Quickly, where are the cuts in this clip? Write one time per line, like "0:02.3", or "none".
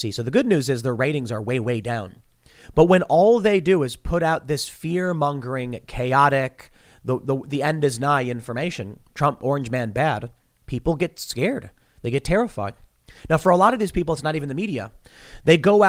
none